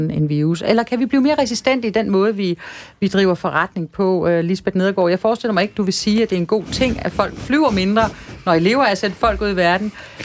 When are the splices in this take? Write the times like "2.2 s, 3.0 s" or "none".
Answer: none